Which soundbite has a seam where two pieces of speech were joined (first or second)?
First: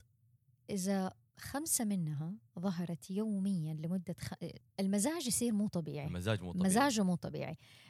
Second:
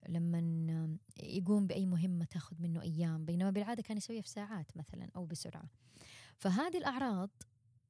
first